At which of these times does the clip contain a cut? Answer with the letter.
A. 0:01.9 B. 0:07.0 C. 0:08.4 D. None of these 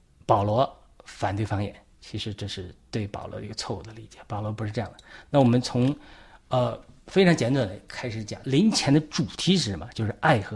C